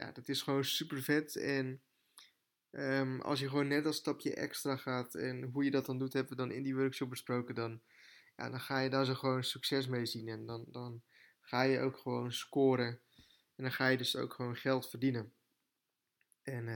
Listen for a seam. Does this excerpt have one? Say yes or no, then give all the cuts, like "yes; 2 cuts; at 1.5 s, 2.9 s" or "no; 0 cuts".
no; 0 cuts